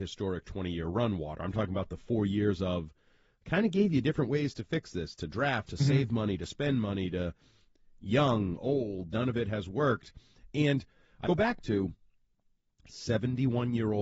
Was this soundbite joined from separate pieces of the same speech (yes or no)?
yes